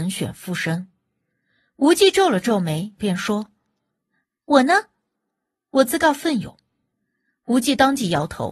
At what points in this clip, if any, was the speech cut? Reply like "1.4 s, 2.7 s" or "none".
3.0 s